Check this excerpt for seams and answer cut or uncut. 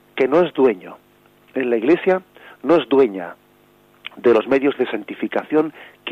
uncut